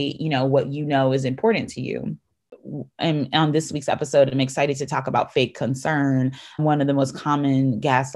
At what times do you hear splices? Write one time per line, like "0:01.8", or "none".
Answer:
0:06.6